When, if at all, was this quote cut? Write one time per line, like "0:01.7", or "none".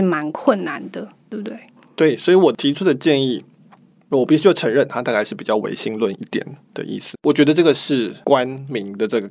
0:01.3
0:07.1